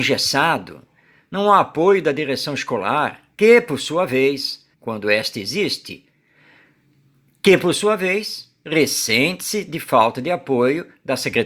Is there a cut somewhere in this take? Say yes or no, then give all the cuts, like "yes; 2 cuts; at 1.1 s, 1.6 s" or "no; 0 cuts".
yes; 2 cuts; at 3.3 s, 4.7 s